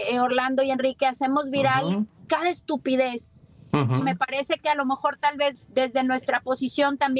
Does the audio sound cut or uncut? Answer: cut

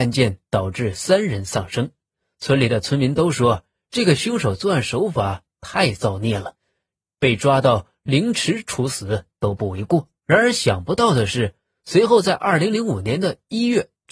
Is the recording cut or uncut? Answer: cut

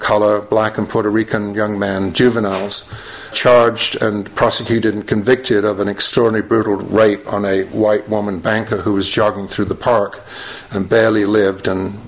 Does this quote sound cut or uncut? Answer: cut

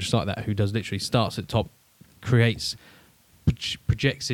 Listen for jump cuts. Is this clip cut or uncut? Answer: uncut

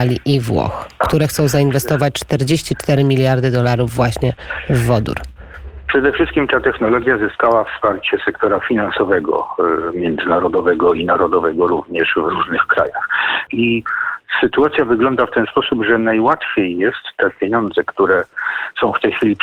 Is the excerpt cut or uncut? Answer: cut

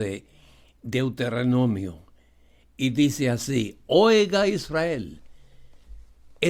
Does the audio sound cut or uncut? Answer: uncut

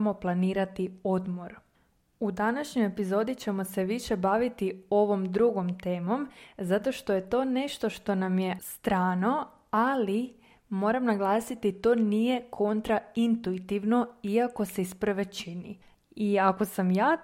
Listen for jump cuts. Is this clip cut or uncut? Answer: cut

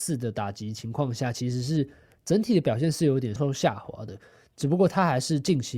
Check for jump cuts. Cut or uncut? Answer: cut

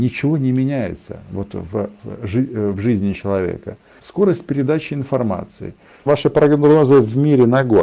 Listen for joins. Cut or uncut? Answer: cut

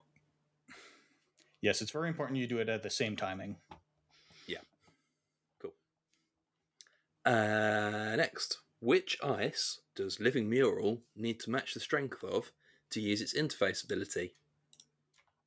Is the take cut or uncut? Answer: uncut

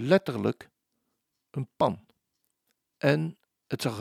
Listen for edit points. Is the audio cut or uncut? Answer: cut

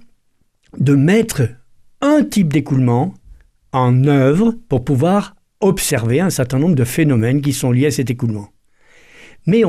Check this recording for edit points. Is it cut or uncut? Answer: uncut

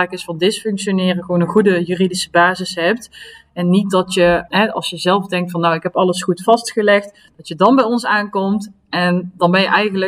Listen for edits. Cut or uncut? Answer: cut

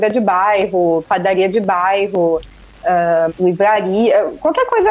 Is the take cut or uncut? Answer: cut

